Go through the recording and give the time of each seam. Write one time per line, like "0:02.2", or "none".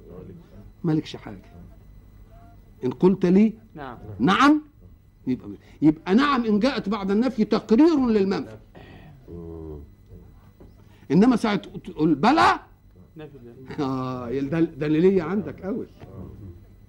none